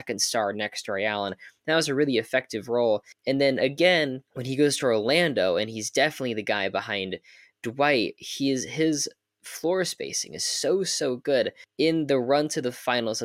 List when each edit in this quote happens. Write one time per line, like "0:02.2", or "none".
0:04.3